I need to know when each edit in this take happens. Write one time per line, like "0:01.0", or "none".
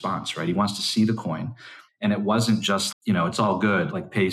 0:01.9
0:02.9